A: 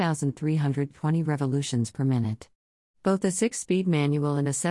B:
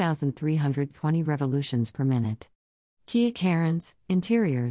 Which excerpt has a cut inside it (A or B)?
B